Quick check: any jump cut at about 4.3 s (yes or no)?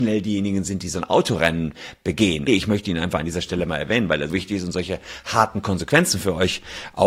yes